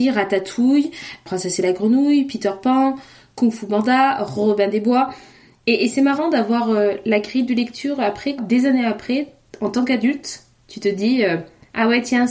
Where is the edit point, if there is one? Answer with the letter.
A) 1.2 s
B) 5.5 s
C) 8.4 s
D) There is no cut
C